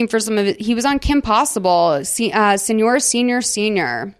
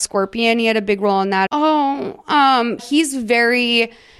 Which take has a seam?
second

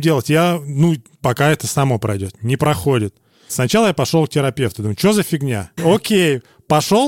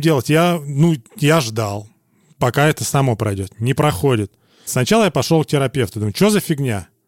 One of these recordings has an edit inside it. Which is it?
first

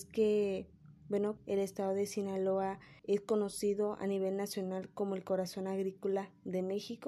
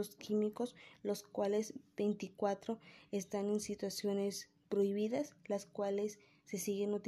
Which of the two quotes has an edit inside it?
first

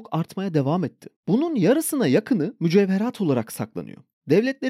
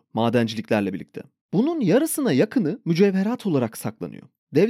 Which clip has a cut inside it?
first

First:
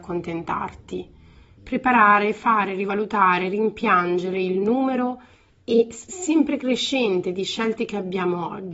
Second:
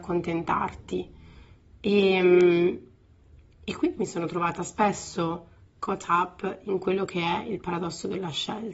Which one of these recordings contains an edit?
first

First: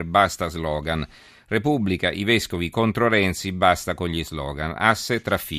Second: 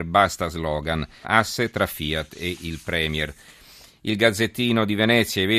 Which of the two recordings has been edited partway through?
second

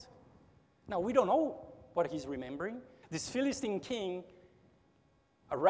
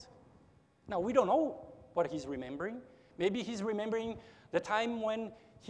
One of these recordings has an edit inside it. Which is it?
first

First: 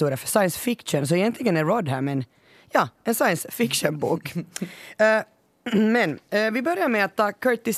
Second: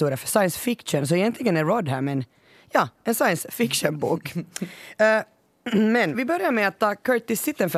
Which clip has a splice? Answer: second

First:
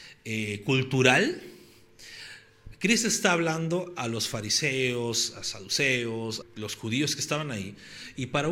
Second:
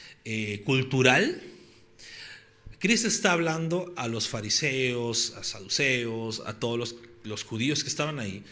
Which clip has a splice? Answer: first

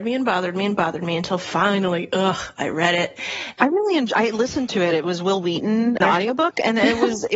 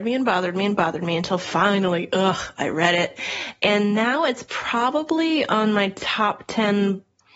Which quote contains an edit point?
first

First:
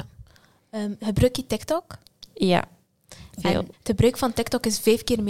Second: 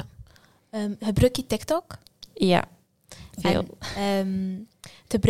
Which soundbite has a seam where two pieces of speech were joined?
first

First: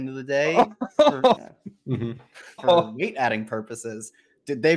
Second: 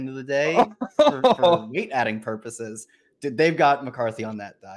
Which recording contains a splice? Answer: first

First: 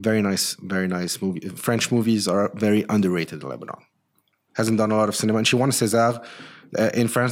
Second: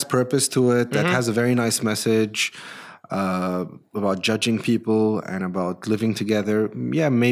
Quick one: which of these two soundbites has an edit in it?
first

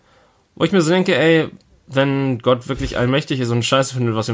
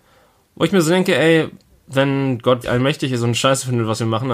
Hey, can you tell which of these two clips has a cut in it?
second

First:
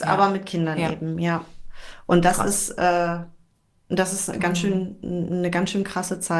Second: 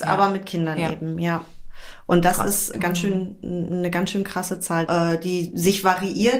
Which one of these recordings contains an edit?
second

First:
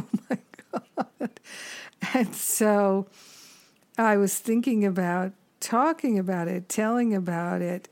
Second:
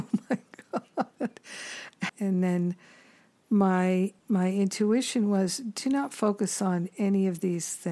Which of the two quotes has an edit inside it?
second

